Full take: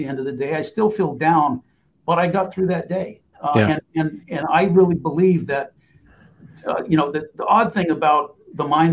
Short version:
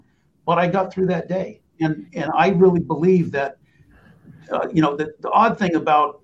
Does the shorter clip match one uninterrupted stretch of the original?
no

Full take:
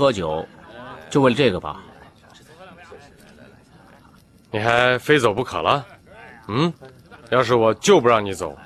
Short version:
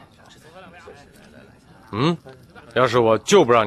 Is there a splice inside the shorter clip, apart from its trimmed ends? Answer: yes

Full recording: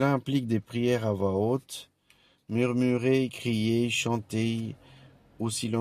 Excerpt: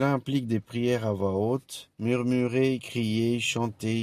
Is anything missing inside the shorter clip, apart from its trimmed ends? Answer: yes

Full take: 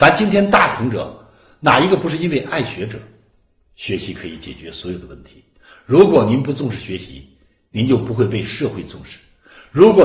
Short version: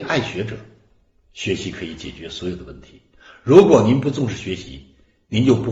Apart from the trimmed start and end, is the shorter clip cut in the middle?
no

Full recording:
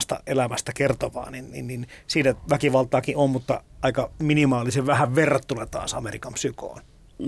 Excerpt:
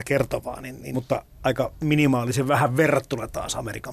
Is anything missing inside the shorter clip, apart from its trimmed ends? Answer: yes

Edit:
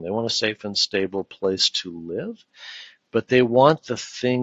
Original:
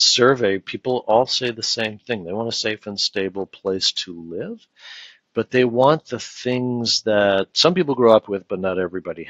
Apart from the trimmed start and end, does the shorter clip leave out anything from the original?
no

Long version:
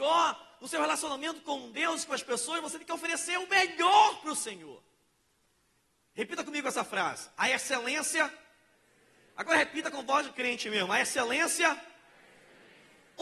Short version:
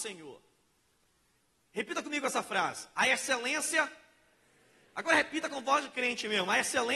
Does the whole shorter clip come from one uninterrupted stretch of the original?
yes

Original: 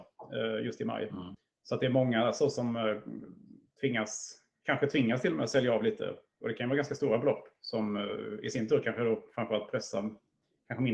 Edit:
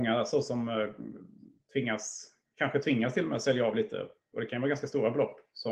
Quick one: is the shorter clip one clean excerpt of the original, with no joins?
yes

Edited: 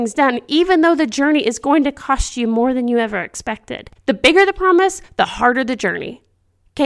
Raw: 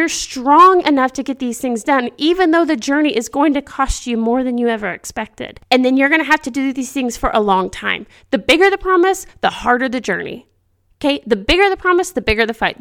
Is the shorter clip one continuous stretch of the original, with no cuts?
no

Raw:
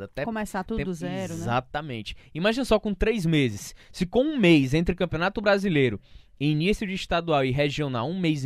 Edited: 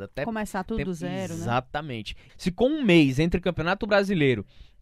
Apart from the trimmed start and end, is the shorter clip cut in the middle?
yes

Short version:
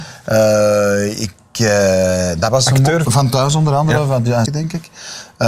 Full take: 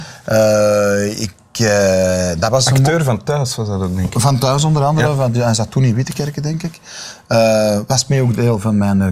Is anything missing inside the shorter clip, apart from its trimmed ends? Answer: yes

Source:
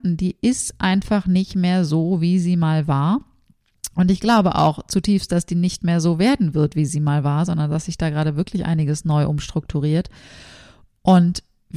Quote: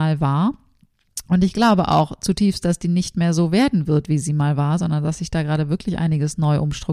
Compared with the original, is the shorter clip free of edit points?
yes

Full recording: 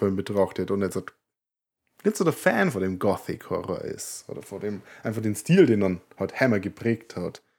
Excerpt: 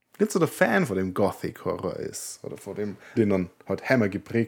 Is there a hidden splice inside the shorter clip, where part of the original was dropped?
yes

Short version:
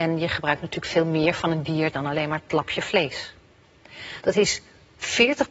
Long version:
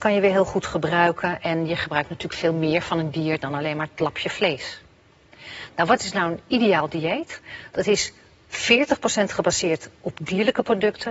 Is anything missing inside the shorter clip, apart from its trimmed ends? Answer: yes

